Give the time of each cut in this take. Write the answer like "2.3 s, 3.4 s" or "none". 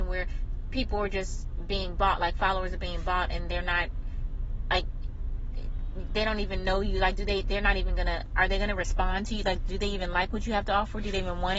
none